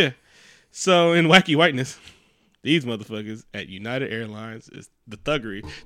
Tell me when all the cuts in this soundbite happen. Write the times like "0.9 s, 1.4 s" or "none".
none